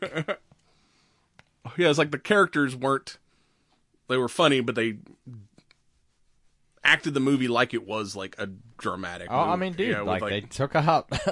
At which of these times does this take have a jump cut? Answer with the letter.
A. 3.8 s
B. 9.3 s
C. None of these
C